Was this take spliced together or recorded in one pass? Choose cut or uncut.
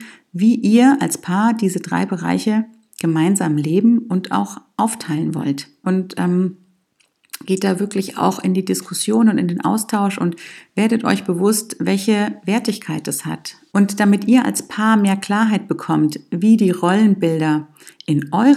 cut